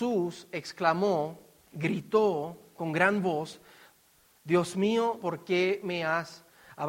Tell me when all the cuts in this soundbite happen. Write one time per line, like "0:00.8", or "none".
0:05.2